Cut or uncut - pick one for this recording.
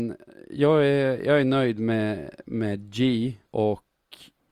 cut